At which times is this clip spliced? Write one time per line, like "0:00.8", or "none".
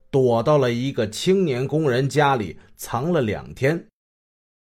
none

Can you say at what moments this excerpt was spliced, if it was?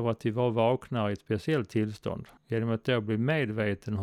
0:02.4

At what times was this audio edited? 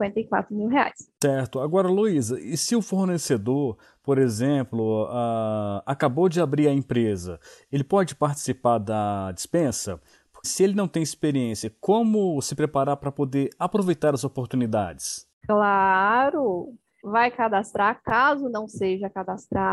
0:10.4
0:17.0

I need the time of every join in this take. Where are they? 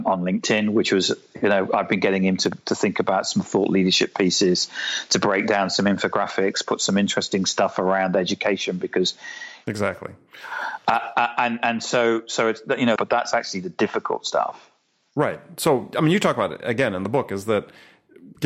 0:09.6
0:13.0

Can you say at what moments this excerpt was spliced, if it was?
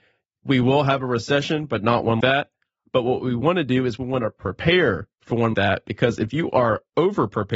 0:02.2
0:05.5

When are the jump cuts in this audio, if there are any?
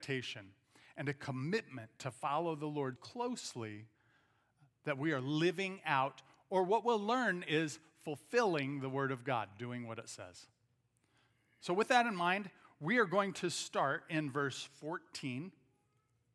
0:03.0

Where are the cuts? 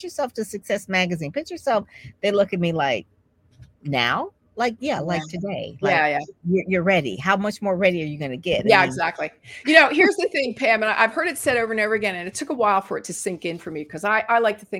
0:03.7

